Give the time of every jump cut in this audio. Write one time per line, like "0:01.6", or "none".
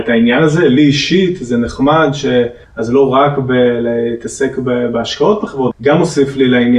0:02.6
0:05.7